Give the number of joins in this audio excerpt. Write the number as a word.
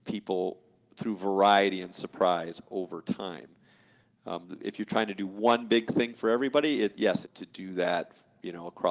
one